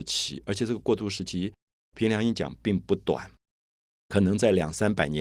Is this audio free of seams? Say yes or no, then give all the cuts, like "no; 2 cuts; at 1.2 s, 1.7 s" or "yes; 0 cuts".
yes; 0 cuts